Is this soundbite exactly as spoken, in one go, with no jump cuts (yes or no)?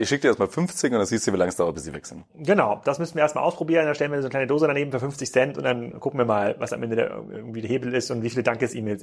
no